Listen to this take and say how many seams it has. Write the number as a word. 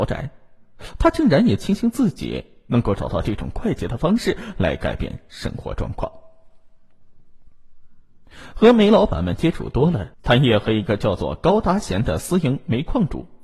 one